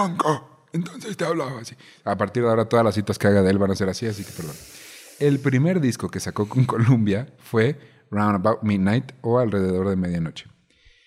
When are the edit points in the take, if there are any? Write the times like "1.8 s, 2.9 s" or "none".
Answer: none